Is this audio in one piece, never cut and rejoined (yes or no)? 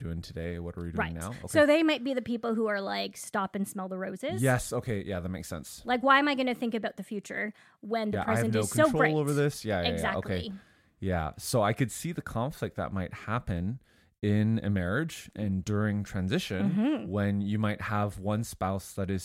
yes